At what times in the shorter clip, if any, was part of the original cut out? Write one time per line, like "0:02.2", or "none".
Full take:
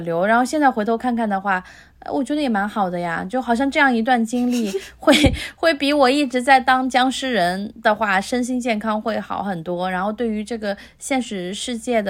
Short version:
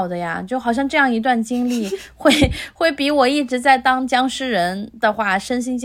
none